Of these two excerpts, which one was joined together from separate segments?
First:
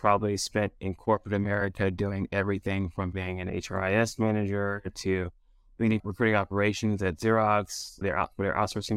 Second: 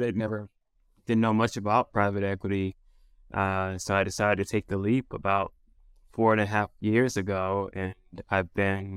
first; 2 cuts; at 6.0 s, 8.0 s

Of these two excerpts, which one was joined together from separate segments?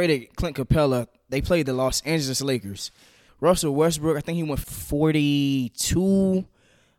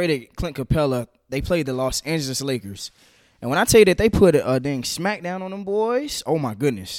first; 2 cuts; at 3.3 s, 4.6 s

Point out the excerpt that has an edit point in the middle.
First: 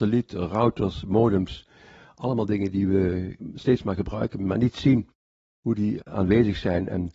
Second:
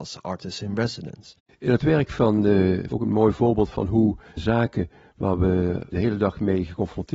second; 2 cuts; at 1.5 s, 2.9 s

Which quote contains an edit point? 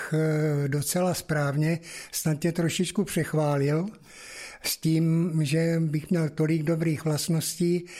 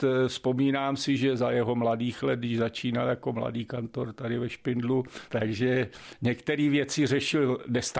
second; 1 cut; at 5.3 s

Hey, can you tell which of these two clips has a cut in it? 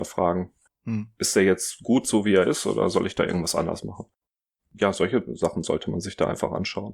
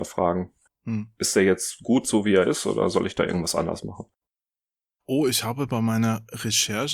first; 1 cut; at 4.6 s

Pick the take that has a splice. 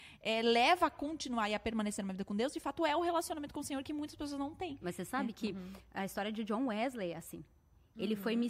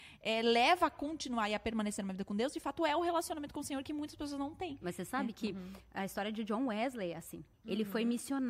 second; 1 cut; at 7.5 s

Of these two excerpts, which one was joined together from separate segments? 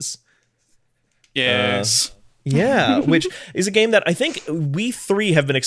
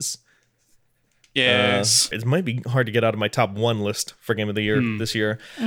second; 1 cut; at 2.1 s

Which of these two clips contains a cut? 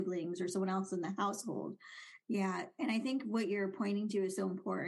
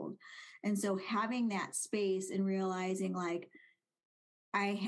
first; 1 cut; at 2.2 s

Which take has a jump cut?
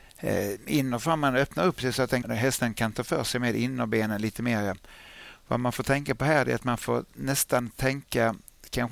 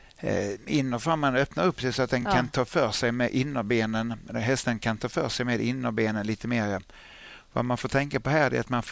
first; 1 cut; at 2.2 s

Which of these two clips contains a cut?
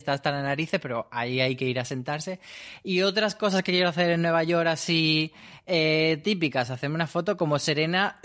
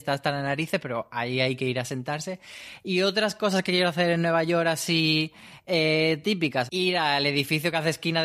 second; 1 cut; at 6.7 s

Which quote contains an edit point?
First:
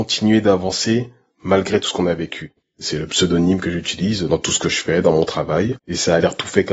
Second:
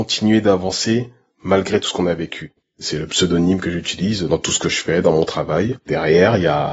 first; 1 cut; at 5.8 s

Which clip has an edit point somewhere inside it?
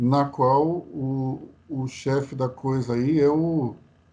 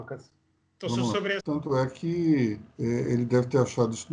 second; 2 cuts; at 1.4 s, 2.7 s

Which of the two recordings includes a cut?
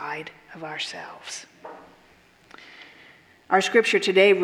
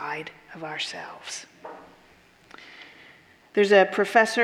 second; 1 cut; at 3.4 s

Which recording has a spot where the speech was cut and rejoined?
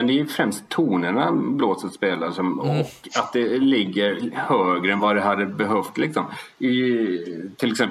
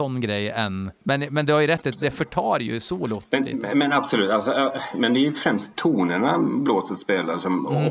second; 1 cut; at 1.0 s

